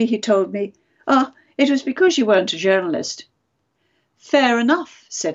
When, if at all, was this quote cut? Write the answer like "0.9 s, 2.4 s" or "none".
none